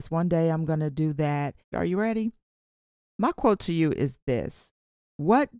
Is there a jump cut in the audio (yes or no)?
yes